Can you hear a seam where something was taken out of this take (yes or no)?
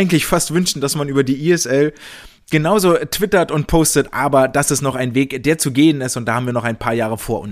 no